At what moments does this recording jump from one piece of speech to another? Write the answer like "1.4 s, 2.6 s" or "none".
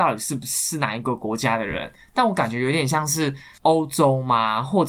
none